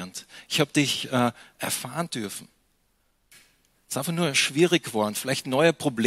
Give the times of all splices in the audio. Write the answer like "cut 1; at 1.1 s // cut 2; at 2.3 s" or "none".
cut 1; at 3.7 s